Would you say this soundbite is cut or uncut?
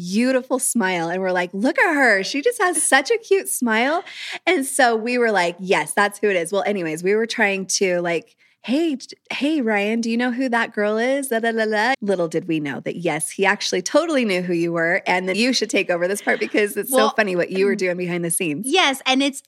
cut